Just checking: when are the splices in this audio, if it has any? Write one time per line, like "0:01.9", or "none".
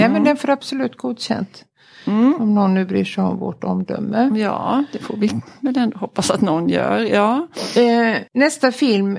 0:08.3